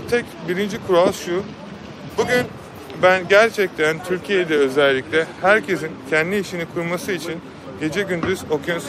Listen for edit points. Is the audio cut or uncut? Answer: cut